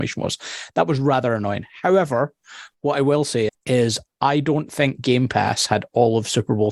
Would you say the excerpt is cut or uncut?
cut